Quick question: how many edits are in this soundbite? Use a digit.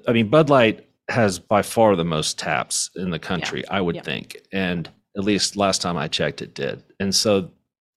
0